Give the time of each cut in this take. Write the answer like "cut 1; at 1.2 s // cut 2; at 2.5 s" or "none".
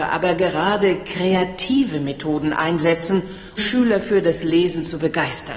cut 1; at 3.6 s